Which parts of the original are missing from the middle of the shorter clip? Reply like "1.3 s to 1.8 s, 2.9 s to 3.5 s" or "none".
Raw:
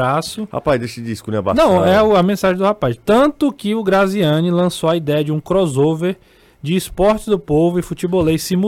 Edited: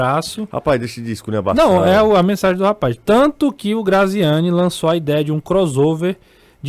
none